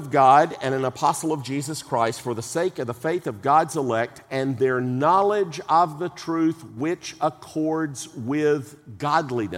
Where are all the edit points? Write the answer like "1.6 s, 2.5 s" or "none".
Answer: none